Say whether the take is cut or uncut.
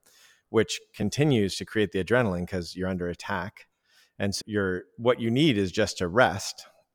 cut